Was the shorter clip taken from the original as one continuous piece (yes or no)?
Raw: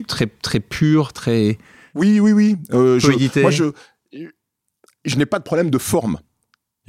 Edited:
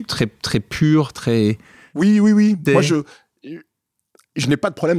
no